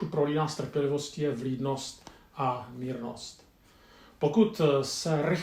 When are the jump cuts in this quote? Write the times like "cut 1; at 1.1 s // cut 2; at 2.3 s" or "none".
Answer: none